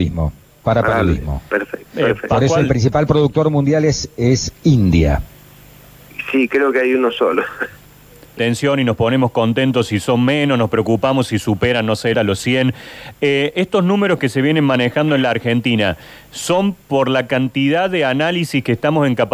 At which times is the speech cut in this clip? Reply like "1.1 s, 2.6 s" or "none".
8.4 s, 12.1 s